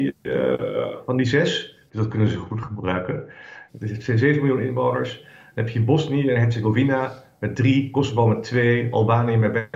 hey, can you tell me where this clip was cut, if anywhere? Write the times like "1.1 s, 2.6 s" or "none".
1.9 s, 3.7 s